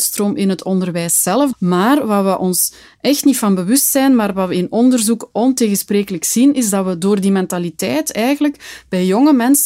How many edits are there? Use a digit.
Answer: 1